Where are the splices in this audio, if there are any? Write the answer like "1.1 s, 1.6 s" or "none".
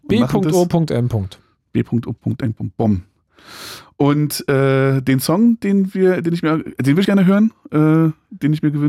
7.0 s